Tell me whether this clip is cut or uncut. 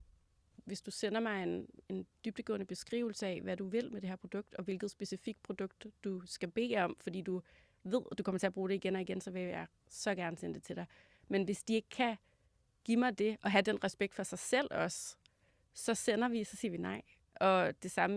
uncut